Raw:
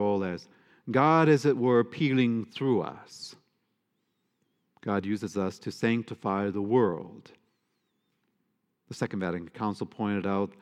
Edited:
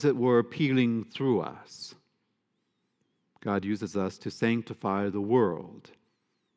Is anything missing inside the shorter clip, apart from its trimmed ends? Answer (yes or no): no